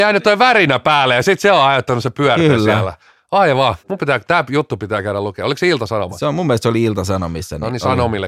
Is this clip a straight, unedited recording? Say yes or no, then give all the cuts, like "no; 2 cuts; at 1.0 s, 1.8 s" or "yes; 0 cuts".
no; 1 cut; at 3.8 s